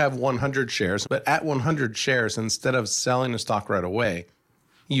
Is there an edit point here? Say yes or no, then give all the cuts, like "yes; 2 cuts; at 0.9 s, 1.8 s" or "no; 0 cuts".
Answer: yes; 1 cut; at 1.0 s